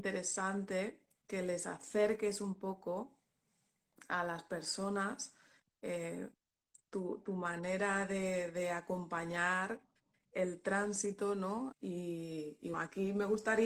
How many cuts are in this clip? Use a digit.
2